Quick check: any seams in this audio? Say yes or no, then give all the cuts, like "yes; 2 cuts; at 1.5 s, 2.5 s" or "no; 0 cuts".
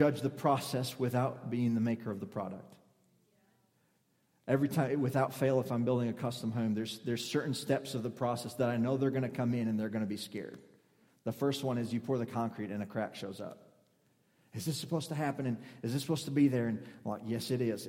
no; 0 cuts